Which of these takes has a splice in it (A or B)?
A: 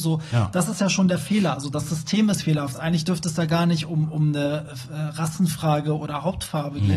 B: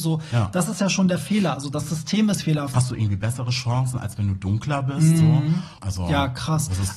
B